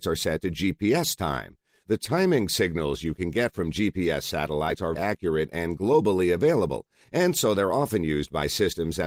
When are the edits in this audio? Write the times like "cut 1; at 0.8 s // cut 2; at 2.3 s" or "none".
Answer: cut 1; at 5.0 s